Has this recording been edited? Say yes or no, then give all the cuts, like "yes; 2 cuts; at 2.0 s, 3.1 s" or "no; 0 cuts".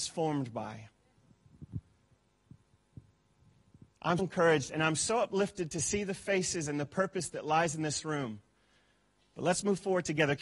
yes; 1 cut; at 4.2 s